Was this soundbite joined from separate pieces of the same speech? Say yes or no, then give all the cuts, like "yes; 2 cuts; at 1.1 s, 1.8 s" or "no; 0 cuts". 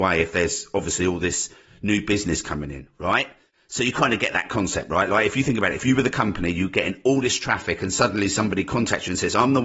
no; 0 cuts